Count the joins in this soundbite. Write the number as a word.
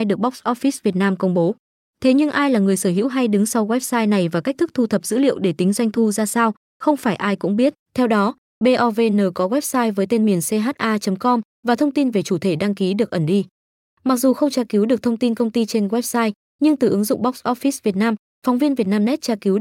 two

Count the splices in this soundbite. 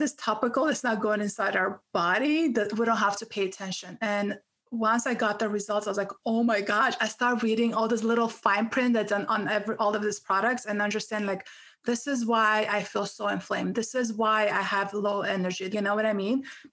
one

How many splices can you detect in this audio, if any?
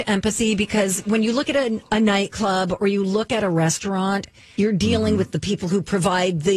one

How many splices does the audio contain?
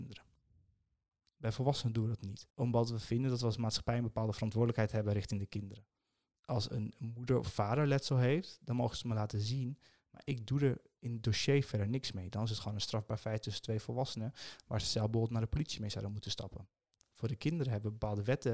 one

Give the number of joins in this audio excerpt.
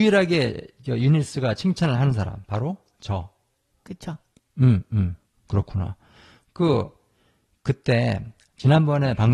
zero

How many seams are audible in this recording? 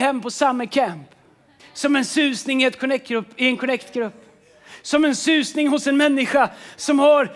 one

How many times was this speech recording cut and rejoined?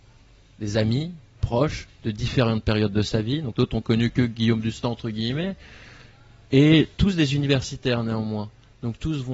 one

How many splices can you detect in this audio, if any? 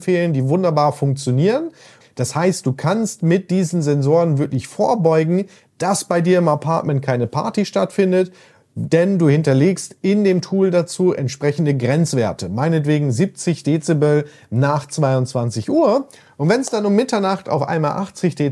one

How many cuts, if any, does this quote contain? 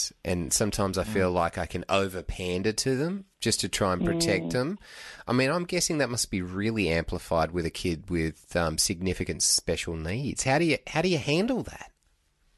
zero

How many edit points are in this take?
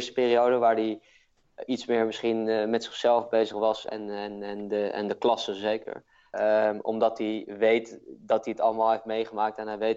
two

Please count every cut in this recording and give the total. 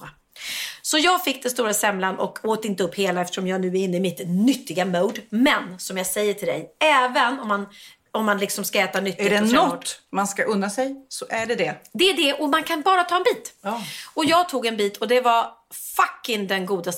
zero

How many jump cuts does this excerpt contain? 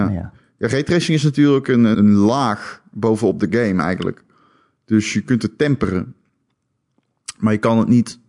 one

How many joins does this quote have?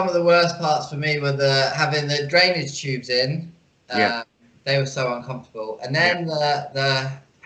zero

